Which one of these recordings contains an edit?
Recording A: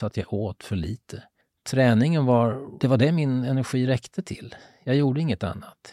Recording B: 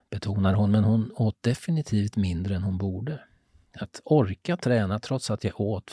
B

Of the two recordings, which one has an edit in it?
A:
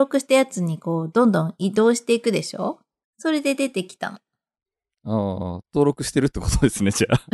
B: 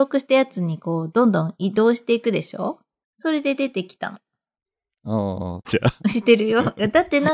B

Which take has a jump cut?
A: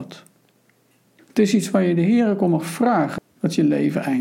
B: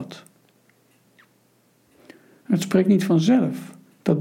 A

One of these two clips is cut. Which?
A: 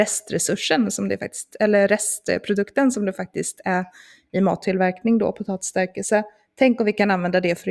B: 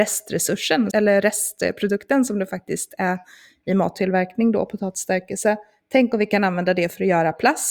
B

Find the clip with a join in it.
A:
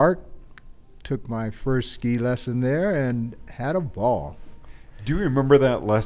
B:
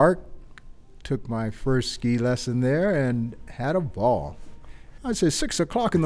B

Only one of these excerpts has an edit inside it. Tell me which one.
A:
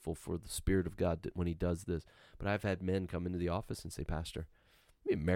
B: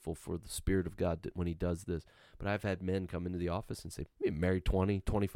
B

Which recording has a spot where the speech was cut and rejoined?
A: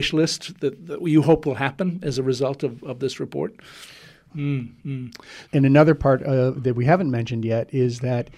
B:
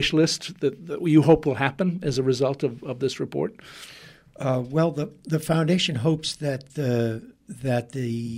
A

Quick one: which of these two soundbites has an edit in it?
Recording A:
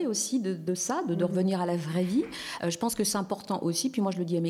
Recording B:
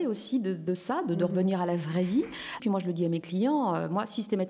B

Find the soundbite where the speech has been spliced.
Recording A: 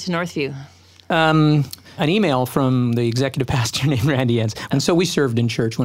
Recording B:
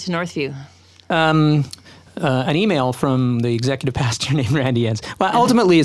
A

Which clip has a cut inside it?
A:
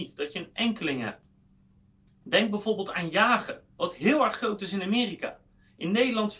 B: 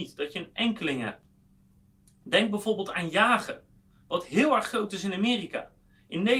A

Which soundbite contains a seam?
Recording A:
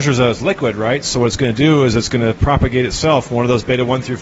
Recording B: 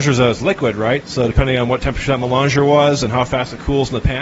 B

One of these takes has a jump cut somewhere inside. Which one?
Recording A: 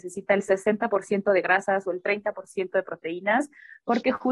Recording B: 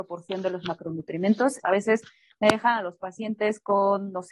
B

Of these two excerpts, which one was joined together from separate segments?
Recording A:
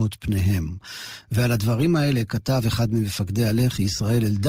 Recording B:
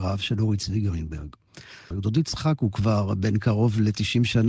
B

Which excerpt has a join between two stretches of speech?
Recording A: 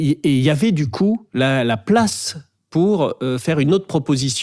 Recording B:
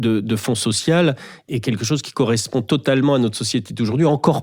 B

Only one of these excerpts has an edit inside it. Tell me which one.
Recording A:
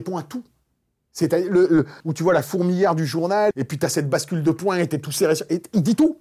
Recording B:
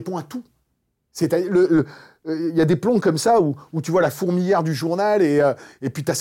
A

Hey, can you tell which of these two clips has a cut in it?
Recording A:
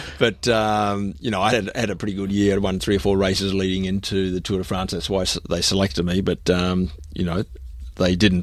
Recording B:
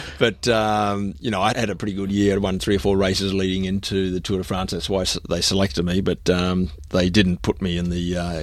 B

